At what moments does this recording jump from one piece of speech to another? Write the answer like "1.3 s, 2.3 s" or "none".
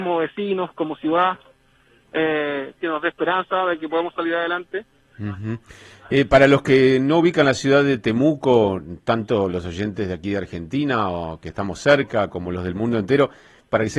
2.8 s, 5.1 s